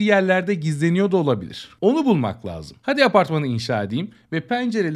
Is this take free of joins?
yes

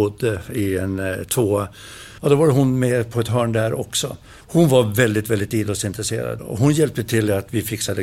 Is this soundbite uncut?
no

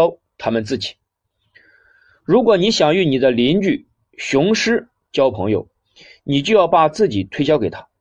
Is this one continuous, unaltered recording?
yes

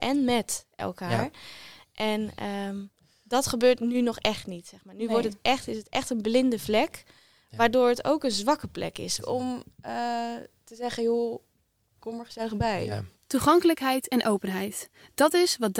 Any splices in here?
yes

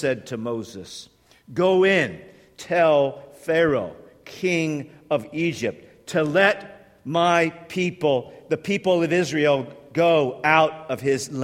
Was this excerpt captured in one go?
yes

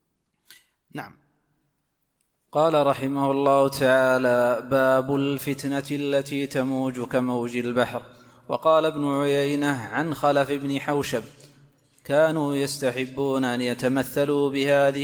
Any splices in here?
no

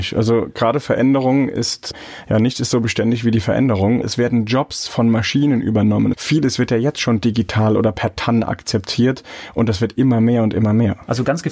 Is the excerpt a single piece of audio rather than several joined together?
no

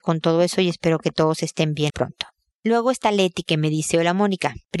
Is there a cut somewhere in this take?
yes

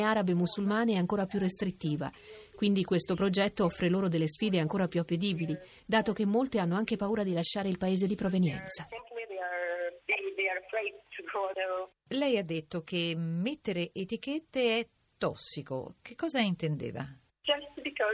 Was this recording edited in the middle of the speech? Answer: no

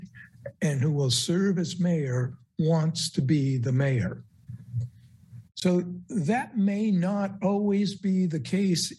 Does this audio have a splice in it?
no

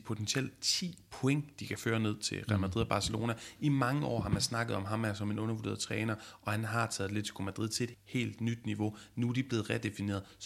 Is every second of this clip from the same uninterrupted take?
no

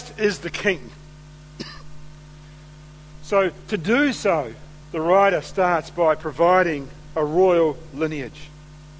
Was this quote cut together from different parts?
yes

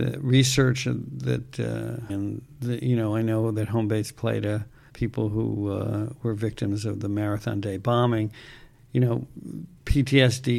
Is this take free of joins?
no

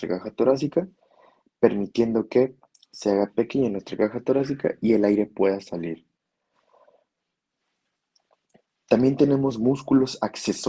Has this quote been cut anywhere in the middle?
no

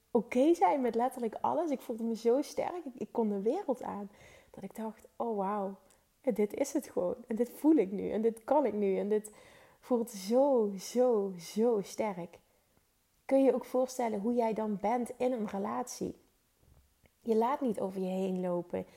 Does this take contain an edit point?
no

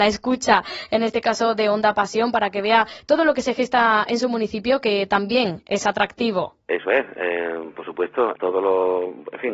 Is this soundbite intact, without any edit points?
no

